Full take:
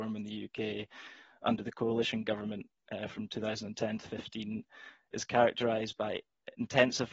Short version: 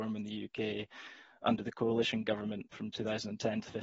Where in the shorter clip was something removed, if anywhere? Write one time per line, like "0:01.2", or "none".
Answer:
0:02.7